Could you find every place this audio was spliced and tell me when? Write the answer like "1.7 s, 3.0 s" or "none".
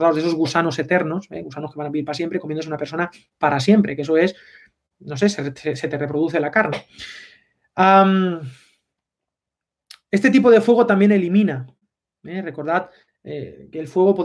none